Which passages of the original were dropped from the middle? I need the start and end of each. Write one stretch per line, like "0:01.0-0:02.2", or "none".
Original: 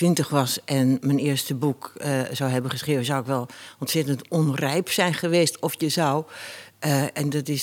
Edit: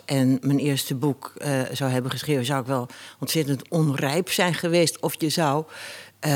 none